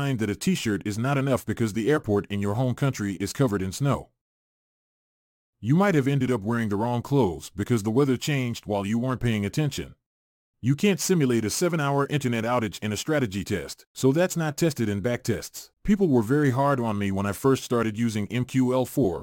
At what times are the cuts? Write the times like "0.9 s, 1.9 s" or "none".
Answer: 5.4 s, 10.5 s, 15.7 s